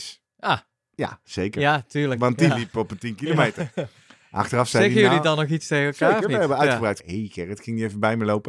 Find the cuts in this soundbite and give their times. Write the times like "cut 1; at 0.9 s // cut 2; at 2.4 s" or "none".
cut 1; at 7.0 s